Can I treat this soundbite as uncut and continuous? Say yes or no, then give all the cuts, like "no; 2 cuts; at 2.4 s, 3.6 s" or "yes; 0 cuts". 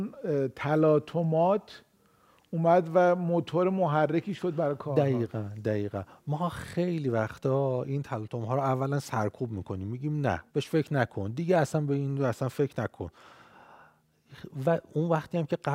no; 1 cut; at 10.5 s